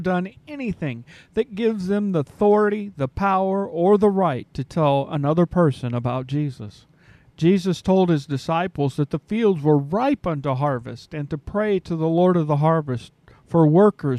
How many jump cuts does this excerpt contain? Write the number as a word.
one